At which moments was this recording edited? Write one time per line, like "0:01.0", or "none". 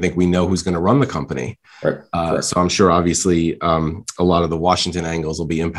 none